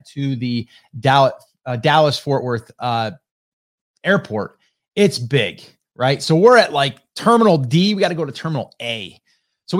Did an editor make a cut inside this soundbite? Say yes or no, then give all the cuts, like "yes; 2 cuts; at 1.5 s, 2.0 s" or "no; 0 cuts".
no; 0 cuts